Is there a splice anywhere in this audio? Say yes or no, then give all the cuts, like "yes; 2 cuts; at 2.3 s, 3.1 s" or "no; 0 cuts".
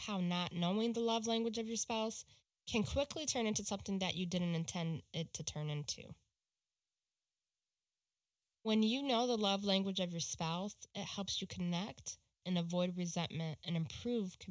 yes; 1 cut; at 12.4 s